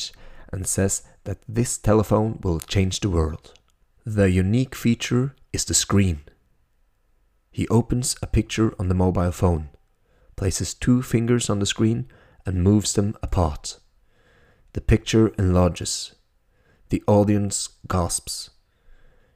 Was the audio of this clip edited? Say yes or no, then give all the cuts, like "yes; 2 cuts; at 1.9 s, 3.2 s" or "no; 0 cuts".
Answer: no; 0 cuts